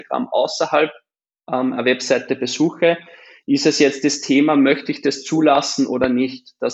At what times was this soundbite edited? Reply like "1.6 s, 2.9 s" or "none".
none